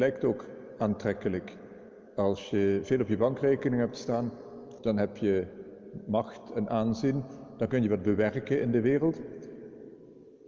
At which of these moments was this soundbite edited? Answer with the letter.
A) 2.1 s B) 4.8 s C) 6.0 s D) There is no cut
B